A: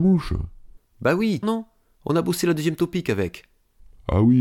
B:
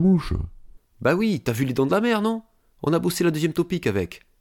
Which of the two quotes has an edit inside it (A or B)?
A